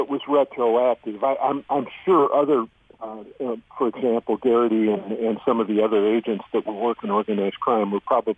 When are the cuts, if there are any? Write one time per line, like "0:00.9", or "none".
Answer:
none